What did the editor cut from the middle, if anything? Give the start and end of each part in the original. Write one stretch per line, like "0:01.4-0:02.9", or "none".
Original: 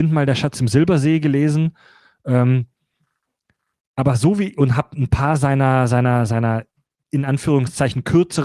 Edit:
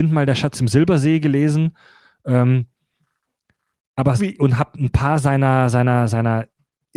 0:04.2-0:04.4